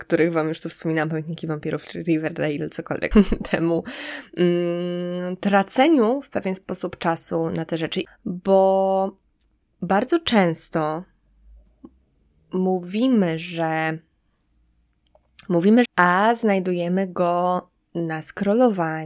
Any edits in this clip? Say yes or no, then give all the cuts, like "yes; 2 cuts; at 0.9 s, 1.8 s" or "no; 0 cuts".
yes; 3 cuts; at 3.1 s, 8.1 s, 15.9 s